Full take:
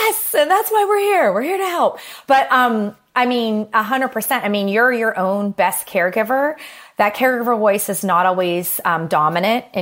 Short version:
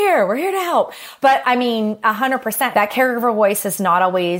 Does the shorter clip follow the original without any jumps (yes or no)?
no